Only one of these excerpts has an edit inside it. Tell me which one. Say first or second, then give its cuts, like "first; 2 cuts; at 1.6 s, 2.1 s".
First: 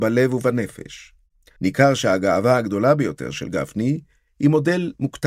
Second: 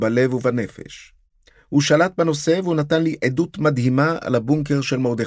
first; 1 cut; at 1.6 s